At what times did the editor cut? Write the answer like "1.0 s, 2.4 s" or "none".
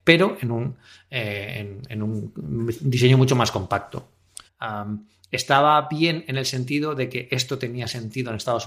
4.5 s